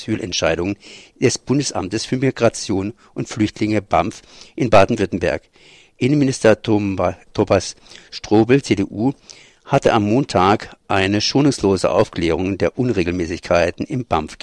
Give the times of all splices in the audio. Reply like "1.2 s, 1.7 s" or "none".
none